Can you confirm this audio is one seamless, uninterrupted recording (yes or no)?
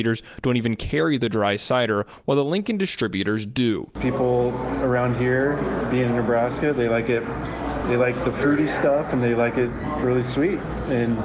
yes